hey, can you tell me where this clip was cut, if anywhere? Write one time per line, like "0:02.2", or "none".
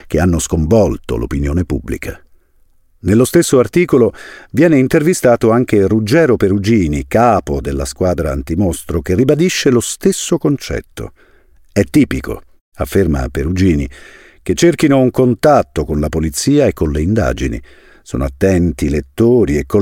none